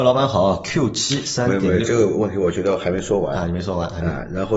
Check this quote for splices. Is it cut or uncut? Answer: uncut